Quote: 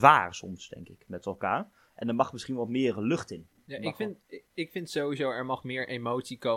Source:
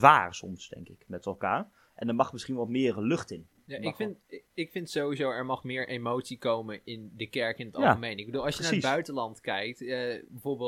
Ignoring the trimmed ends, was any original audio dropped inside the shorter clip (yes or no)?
no